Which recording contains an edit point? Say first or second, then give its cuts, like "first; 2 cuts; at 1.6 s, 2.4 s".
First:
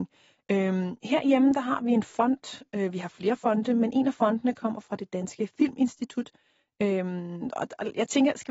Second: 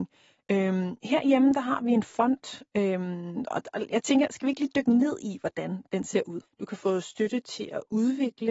second; 2 cuts; at 2.7 s, 6.4 s